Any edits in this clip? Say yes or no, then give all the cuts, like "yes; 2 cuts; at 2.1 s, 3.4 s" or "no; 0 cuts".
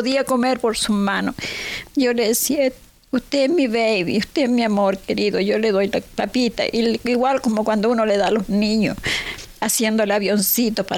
no; 0 cuts